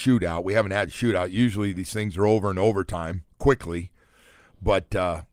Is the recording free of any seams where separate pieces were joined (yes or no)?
yes